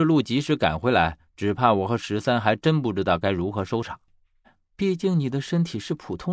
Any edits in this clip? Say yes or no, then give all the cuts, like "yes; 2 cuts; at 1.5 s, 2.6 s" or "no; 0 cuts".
yes; 1 cut; at 4.4 s